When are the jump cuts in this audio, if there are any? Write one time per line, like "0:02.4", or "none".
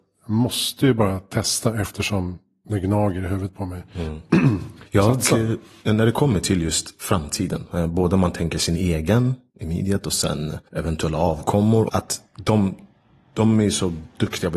0:04.9
0:10.7
0:11.9